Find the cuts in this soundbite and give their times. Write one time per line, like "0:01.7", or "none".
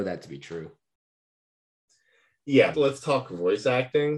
0:02.7